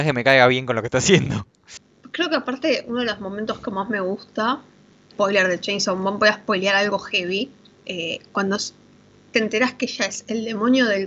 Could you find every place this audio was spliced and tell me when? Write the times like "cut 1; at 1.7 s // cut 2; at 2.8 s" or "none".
cut 1; at 5.1 s // cut 2; at 7.7 s